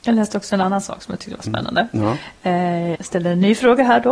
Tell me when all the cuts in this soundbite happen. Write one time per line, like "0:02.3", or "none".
0:02.9